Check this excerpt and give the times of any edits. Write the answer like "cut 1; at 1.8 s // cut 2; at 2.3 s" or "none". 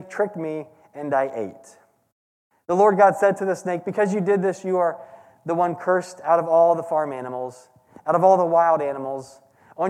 none